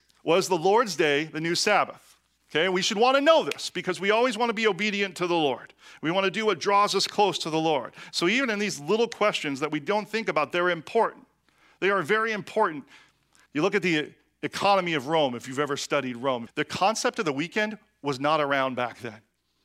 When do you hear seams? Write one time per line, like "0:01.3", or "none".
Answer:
0:13.5
0:16.5